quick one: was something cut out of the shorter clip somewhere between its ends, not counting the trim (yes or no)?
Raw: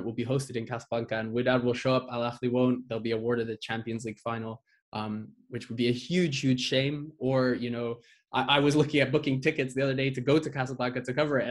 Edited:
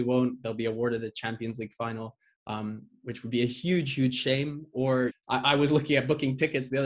yes